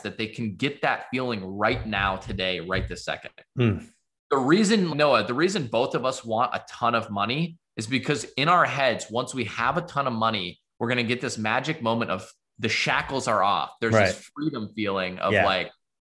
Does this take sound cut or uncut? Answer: cut